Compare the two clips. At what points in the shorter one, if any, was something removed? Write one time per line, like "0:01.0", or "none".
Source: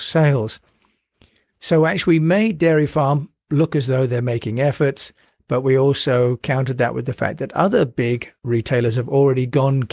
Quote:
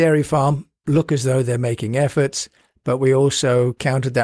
none